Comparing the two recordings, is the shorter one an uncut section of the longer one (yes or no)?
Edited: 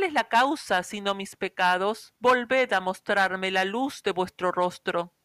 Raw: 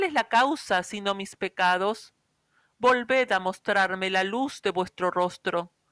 no